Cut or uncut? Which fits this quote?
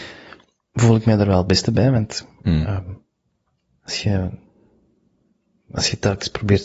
uncut